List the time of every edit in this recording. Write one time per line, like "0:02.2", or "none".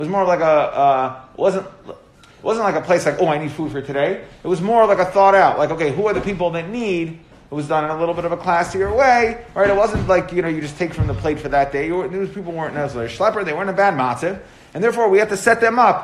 none